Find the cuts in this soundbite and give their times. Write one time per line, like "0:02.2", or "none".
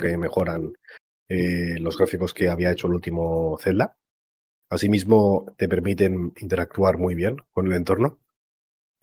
none